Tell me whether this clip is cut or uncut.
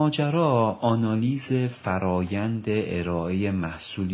uncut